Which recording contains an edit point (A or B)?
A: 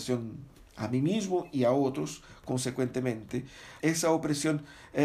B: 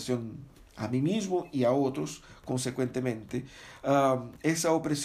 A